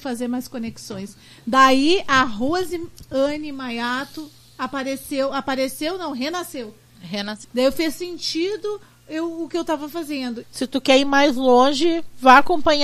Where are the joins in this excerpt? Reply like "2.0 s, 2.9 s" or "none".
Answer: 7.4 s, 10.4 s